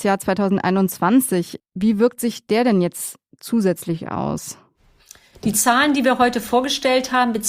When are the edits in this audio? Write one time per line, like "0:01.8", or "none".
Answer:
0:01.6